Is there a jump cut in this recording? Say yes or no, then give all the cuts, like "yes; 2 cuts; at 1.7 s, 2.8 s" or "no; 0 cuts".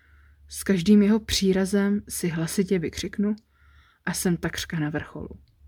no; 0 cuts